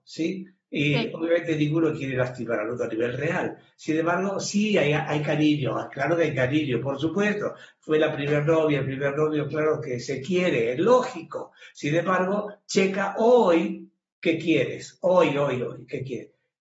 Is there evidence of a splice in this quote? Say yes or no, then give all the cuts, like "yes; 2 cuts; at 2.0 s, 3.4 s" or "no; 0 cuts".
no; 0 cuts